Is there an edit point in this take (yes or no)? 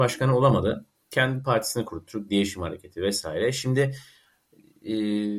no